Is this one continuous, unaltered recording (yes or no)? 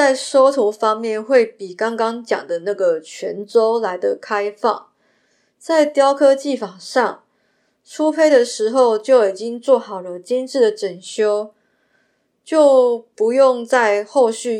yes